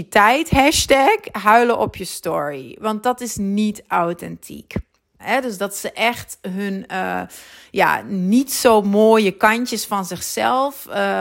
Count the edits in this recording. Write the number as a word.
one